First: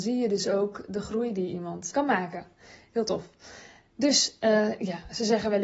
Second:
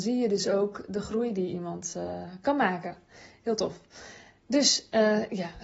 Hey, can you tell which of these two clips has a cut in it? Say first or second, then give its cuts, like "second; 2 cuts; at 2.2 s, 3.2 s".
first; 1 cut; at 1.9 s